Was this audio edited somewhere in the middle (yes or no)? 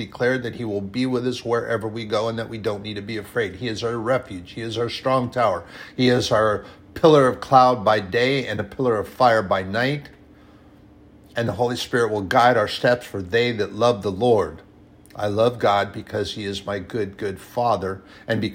no